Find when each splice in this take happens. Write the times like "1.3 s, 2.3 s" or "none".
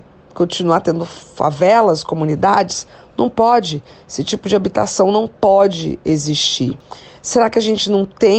none